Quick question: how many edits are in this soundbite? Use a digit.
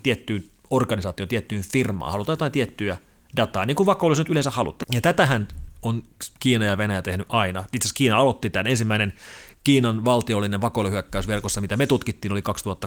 1